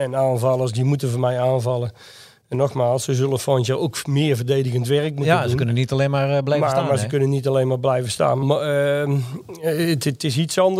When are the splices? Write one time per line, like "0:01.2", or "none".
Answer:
0:08.4